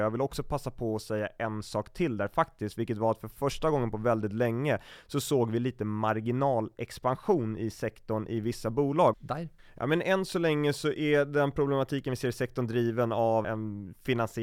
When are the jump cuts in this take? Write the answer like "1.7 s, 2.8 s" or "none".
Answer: 9.1 s, 13.4 s